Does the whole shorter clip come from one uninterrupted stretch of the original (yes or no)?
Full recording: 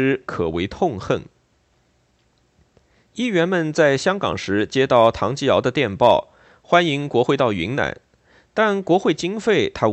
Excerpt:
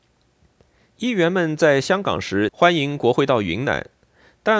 no